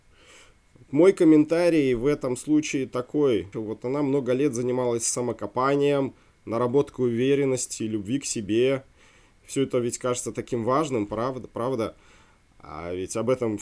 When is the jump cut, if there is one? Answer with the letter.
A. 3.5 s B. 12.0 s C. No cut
A